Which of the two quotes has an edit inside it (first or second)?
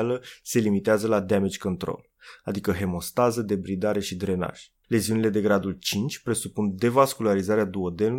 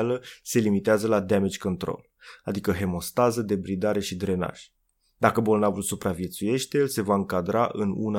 first